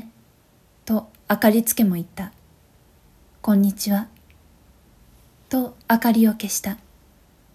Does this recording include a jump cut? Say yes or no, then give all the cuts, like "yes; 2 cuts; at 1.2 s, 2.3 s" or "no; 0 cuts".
yes; 1 cut; at 5.8 s